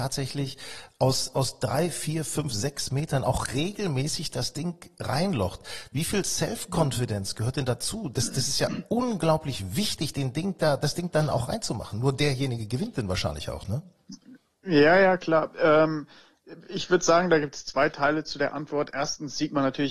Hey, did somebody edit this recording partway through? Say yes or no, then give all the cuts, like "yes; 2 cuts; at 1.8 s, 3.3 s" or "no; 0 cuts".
no; 0 cuts